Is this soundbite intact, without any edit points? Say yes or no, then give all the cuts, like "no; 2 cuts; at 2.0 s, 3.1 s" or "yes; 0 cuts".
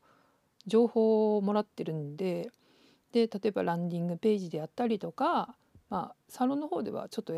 yes; 0 cuts